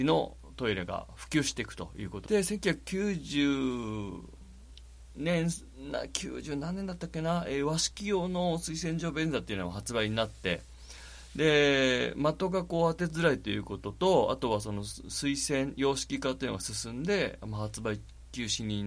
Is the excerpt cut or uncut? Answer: cut